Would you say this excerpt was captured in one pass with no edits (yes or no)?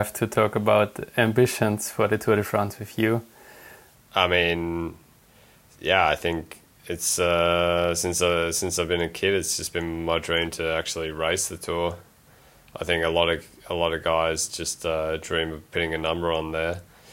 no